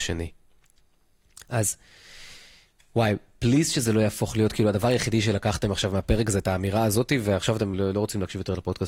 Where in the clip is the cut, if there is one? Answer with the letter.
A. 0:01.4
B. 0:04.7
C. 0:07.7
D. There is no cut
C